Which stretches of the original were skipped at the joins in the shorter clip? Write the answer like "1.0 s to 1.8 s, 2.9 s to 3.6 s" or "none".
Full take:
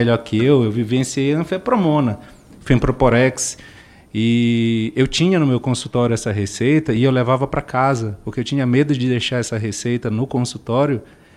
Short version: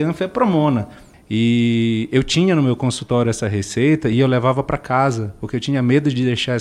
2.4 s to 4.0 s